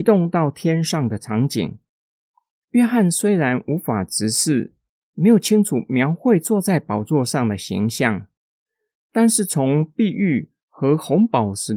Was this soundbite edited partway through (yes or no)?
no